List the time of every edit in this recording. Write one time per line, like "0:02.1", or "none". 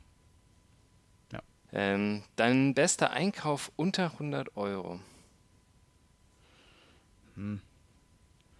0:01.7